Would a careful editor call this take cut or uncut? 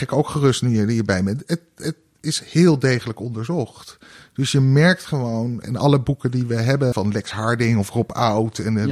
cut